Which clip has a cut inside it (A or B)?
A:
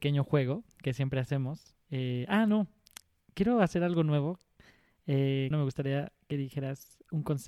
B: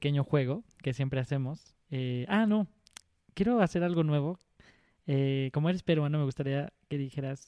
A